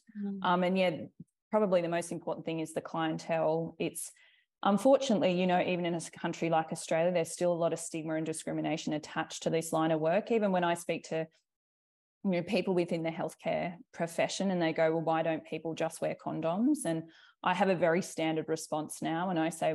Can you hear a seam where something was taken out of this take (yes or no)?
no